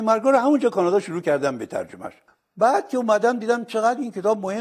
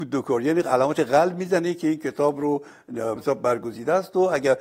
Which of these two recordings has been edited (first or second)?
second